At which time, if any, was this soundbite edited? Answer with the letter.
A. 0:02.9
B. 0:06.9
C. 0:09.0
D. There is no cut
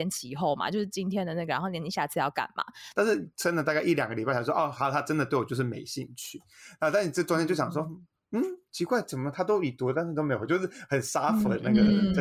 A